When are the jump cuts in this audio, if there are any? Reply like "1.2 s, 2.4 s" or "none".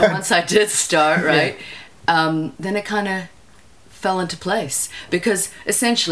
2.6 s